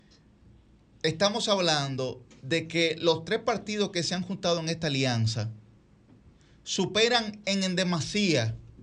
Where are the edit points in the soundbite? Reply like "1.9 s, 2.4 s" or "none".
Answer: none